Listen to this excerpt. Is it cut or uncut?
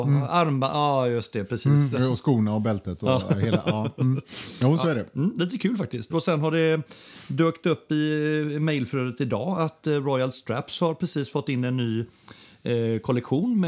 cut